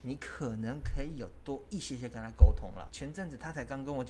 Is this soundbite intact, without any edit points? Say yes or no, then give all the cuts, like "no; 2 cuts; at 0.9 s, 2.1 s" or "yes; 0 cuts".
no; 1 cut; at 2.9 s